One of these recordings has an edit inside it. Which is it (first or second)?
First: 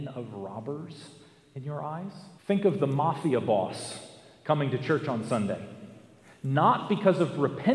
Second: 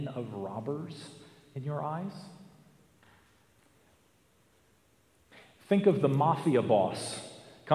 first